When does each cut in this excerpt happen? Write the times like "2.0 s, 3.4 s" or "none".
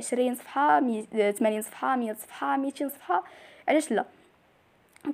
none

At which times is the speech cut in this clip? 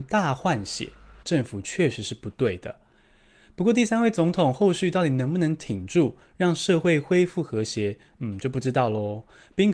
1.2 s

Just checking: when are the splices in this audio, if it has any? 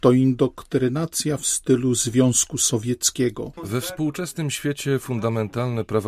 3.6 s

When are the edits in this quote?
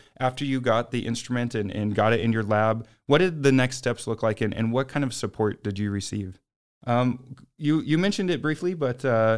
6.7 s

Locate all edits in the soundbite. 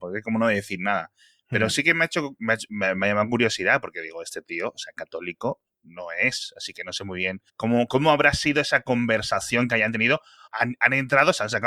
7.5 s, 10.5 s

